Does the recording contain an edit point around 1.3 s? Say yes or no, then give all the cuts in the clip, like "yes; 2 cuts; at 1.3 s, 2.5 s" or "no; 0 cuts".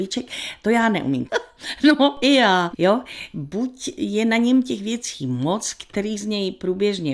yes; 2 cuts; at 1.3 s, 2.7 s